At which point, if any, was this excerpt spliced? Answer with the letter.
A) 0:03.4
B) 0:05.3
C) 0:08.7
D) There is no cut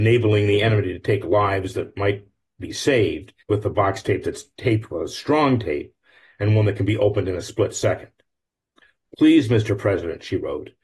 A